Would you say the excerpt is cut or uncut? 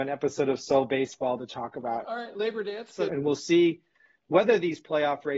cut